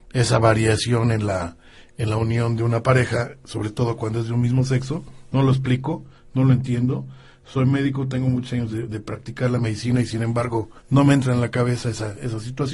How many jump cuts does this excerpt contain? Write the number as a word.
two